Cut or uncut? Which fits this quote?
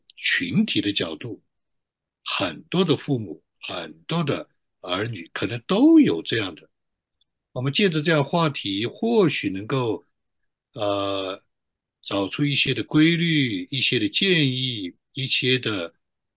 uncut